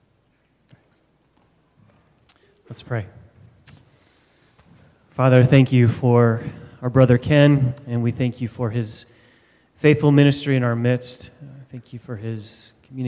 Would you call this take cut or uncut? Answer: uncut